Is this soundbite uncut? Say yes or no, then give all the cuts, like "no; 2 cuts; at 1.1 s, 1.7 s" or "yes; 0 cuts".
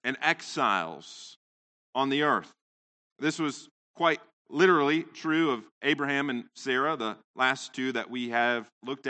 no; 1 cut; at 3.0 s